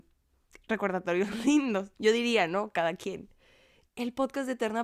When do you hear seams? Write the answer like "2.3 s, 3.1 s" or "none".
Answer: 1.9 s, 3.9 s